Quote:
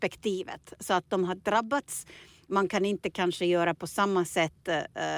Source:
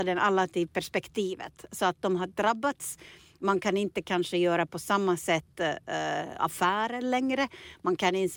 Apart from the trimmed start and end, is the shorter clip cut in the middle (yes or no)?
no